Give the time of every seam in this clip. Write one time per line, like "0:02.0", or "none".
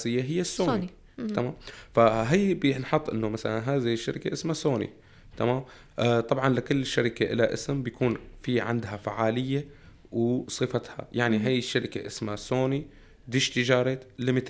none